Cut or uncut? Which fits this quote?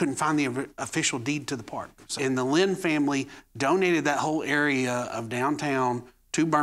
cut